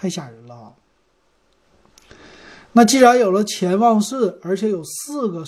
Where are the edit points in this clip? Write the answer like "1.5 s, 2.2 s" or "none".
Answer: none